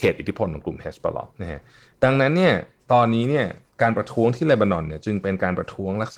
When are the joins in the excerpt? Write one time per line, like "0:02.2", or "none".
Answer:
0:01.3